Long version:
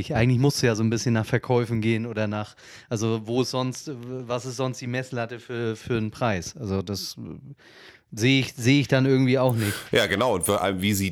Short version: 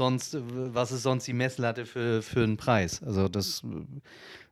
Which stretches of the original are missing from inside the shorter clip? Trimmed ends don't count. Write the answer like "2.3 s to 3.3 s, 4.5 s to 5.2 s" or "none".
none